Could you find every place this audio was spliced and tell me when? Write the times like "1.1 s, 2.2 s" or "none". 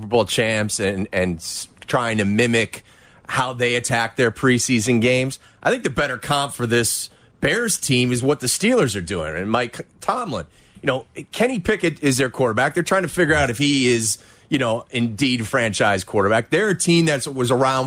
none